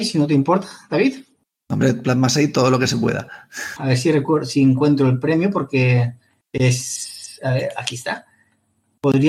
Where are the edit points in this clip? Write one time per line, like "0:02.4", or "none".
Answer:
0:03.8